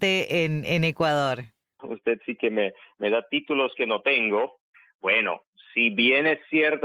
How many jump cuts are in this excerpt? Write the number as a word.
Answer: two